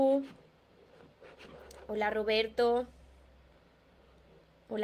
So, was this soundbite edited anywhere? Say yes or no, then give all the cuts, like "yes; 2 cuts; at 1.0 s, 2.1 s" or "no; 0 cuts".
no; 0 cuts